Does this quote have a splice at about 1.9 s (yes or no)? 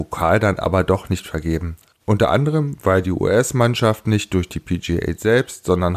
yes